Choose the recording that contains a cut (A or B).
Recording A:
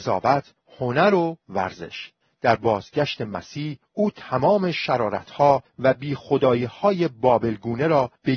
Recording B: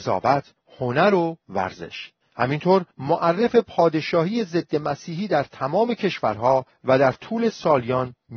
A